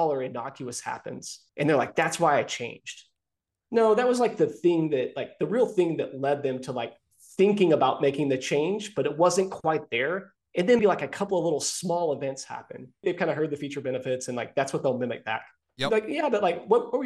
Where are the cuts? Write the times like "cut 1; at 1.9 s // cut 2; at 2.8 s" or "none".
cut 1; at 1.5 s // cut 2; at 10.8 s // cut 3; at 13.0 s